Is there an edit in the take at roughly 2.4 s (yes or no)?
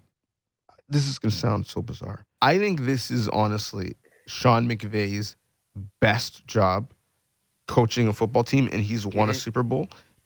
yes